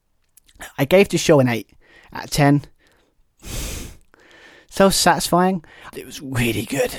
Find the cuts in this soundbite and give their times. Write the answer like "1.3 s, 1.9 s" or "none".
3.4 s, 5.9 s